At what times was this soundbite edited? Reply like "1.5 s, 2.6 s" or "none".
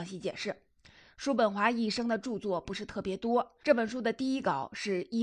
3.6 s

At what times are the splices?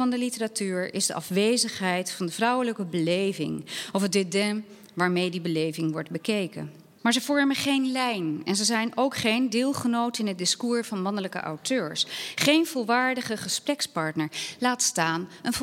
7.0 s

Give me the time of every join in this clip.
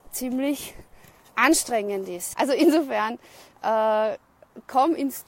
2.3 s

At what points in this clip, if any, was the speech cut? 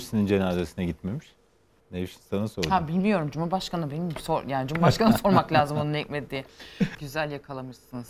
1.8 s, 6.9 s

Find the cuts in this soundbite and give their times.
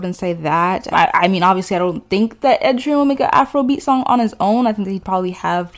0.9 s

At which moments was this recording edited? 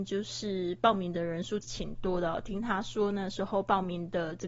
1.6 s

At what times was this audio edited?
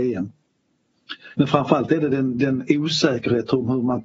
1.4 s

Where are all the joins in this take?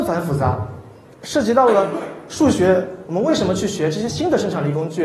3.0 s

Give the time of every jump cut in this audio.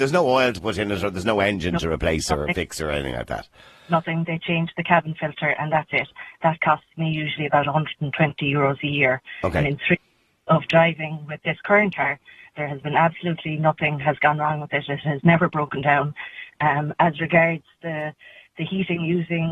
none

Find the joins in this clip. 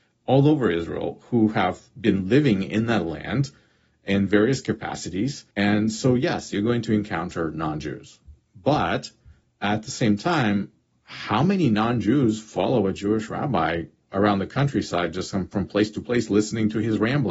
5.5 s

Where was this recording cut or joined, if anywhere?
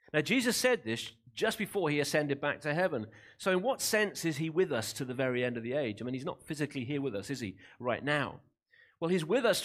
none

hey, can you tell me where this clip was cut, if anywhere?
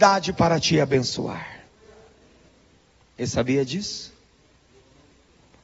none

